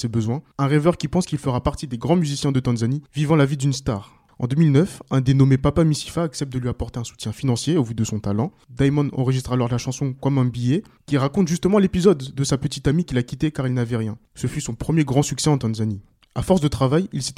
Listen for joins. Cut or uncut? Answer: uncut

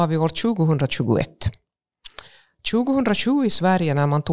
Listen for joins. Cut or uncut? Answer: uncut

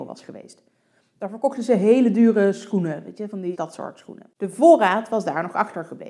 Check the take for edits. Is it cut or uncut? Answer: cut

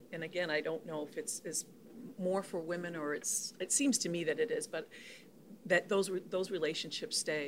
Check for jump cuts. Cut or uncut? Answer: uncut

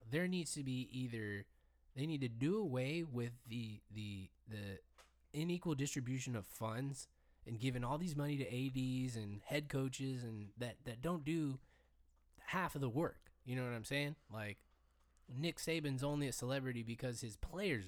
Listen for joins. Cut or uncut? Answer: uncut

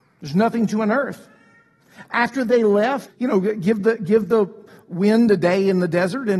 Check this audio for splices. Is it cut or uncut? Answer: cut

